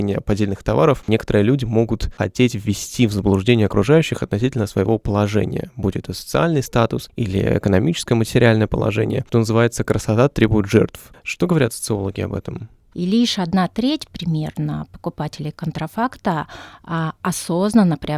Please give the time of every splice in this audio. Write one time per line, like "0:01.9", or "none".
0:12.9